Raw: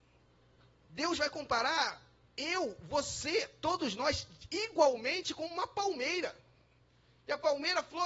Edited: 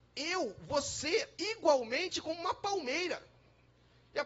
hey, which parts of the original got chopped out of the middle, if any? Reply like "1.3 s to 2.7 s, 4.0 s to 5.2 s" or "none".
3.6 s to 4.5 s